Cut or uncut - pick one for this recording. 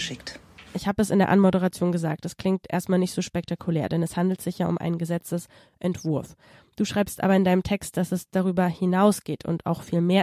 uncut